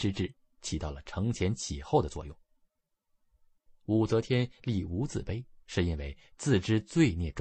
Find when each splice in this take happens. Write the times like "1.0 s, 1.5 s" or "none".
3.7 s